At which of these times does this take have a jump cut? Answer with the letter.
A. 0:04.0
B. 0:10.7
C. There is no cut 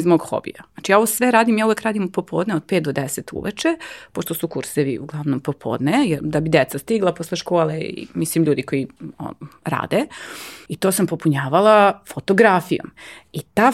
B